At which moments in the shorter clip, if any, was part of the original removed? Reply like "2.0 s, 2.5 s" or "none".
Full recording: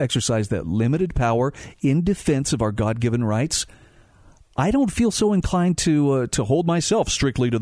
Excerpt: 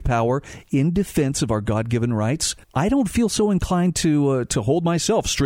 2.6 s